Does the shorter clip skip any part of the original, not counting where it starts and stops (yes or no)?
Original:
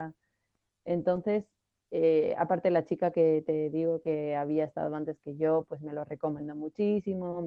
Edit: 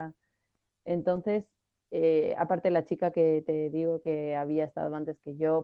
no